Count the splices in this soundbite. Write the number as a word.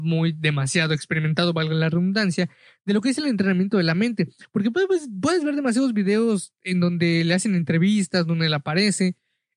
zero